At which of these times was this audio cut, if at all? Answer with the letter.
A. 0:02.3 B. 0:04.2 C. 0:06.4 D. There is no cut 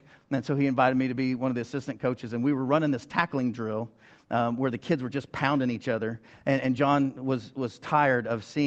D